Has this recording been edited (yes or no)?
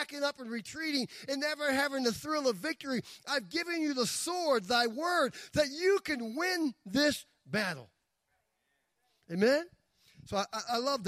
no